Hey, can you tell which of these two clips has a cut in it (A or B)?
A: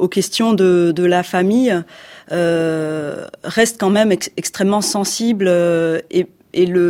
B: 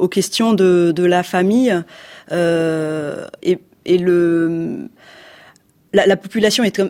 B